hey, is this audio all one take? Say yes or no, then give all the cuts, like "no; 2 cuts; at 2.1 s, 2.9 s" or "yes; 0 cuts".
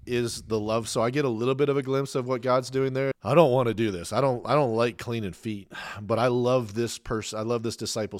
no; 1 cut; at 3.1 s